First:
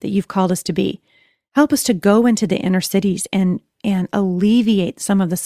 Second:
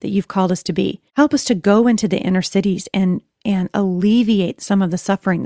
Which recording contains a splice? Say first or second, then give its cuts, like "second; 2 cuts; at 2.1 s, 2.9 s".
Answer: second; 1 cut; at 1.1 s